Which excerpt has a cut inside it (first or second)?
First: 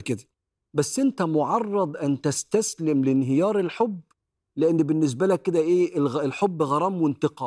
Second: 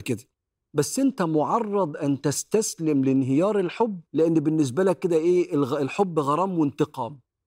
second